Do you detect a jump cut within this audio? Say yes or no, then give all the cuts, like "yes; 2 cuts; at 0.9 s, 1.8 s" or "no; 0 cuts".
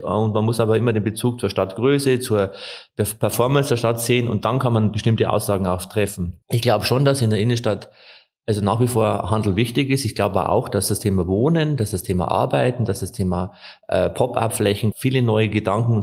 yes; 2 cuts; at 6.4 s, 14.9 s